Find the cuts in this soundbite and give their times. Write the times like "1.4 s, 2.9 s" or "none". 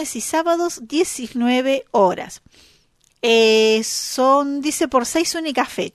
none